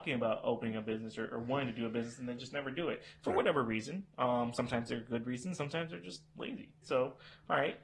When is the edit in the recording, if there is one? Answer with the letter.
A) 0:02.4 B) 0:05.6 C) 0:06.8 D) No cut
C